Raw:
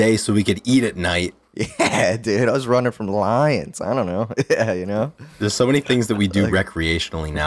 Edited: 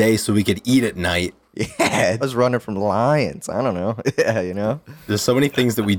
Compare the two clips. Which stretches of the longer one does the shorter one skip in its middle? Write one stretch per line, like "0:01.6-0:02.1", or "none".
0:02.2-0:02.5